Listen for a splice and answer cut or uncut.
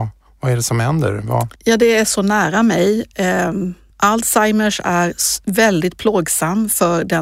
cut